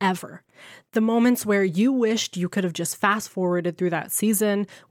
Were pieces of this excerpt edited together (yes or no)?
no